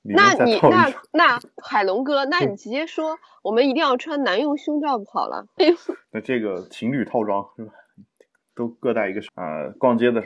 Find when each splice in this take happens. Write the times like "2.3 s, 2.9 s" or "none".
5.6 s, 9.3 s